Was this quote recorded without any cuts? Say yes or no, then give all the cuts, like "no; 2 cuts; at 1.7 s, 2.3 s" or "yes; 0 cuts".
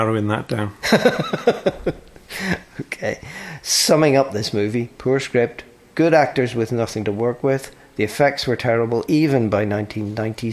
yes; 0 cuts